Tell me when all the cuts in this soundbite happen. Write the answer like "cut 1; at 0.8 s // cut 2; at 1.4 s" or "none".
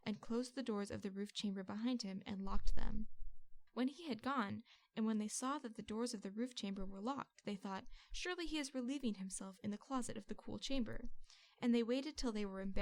cut 1; at 3.7 s // cut 2; at 4.8 s